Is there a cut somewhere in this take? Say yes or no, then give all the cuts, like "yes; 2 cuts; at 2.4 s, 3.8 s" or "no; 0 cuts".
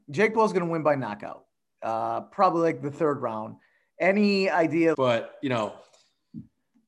yes; 1 cut; at 4.9 s